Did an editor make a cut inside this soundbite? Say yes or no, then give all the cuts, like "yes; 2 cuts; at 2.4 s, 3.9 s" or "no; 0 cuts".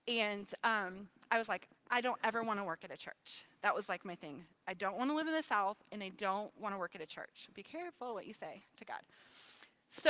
yes; 1 cut; at 1.8 s